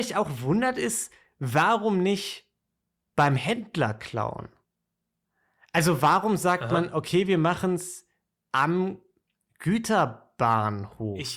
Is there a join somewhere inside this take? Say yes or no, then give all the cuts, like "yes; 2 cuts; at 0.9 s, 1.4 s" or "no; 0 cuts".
no; 0 cuts